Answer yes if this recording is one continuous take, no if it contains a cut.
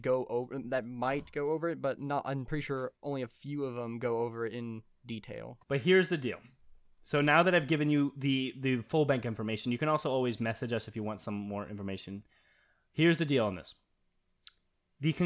no